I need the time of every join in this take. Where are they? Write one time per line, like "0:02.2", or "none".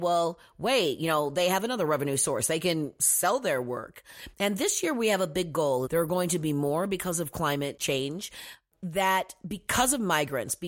0:04.3
0:05.9